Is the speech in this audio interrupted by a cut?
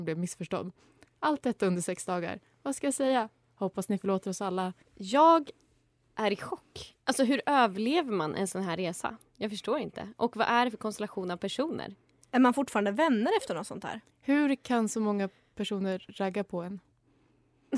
yes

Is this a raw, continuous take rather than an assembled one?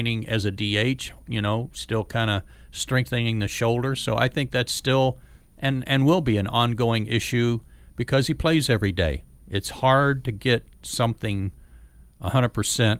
yes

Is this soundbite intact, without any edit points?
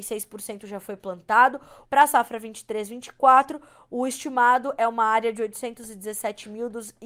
no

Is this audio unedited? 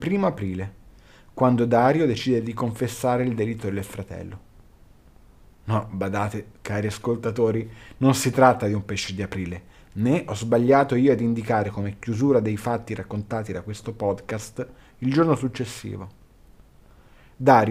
yes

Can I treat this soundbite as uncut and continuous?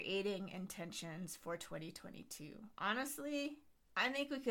yes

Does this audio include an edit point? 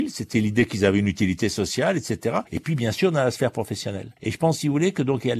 yes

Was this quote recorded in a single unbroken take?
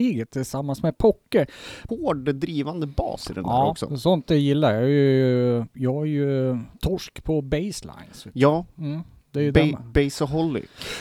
no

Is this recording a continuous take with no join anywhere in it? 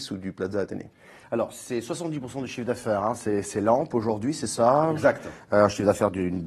yes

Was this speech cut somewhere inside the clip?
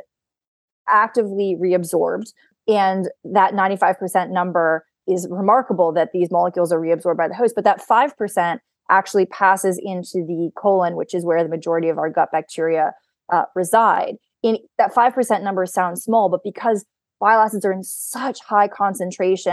no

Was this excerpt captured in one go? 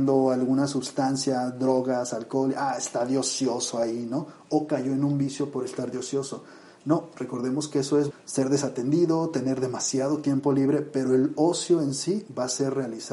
no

